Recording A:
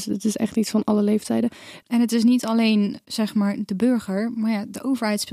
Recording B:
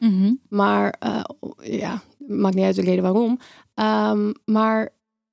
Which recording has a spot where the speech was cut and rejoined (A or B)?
A